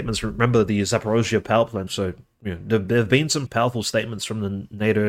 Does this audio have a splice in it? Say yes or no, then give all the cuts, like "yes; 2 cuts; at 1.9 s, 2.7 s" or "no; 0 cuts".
yes; 2 cuts; at 1.9 s, 3.5 s